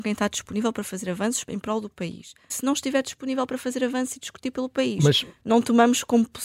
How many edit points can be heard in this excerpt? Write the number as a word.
two